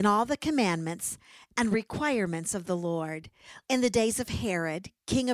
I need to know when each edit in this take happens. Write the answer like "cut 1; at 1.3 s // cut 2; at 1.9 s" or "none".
cut 1; at 3.6 s